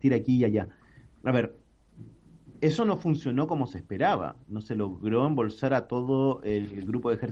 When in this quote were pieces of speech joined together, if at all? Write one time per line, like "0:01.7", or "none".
none